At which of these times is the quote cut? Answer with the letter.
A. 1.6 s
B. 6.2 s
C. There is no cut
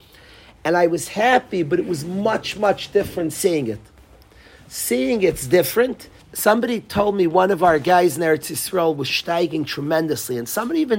B